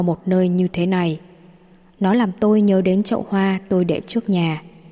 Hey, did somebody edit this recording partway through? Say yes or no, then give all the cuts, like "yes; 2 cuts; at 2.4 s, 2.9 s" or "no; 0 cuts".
no; 0 cuts